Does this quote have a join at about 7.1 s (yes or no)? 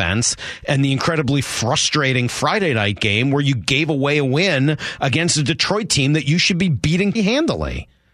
yes